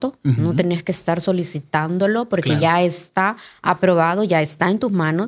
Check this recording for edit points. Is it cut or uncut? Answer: uncut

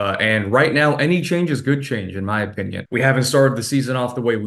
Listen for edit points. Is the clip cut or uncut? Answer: cut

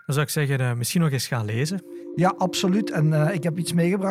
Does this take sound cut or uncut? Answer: uncut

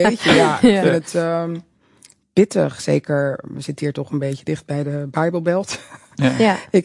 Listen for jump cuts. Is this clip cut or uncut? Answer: uncut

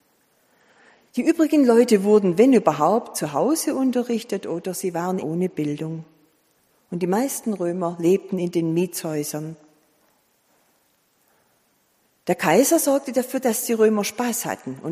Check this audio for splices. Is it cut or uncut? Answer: cut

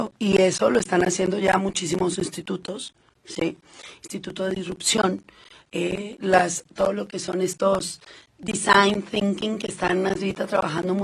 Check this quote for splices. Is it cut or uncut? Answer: uncut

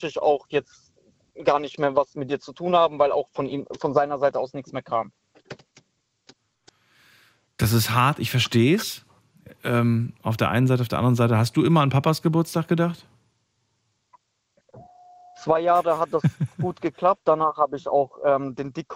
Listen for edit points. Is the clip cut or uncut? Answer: uncut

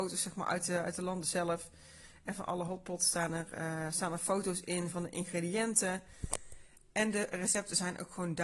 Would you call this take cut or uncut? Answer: uncut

